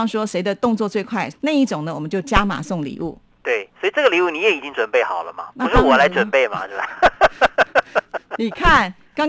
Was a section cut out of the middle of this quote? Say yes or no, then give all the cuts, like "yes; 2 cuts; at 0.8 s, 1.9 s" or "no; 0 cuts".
yes; 1 cut; at 1.3 s